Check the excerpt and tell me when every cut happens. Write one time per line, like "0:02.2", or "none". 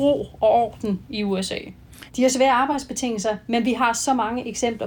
0:02.1